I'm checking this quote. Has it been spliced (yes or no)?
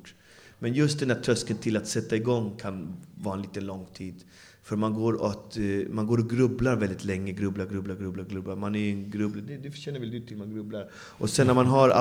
no